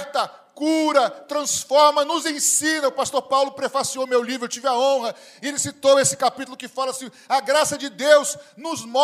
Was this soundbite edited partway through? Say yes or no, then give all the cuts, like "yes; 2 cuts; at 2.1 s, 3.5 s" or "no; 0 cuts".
no; 0 cuts